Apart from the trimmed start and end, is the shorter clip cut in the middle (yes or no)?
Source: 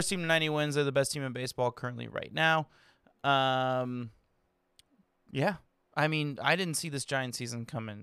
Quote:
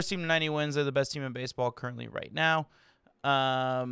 no